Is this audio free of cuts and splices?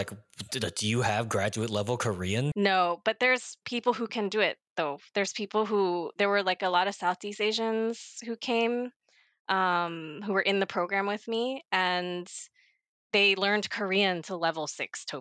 no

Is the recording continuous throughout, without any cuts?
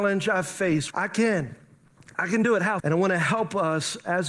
no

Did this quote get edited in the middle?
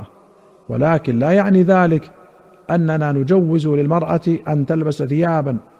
no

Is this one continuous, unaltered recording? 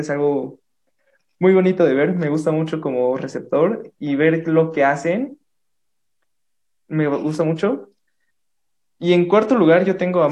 yes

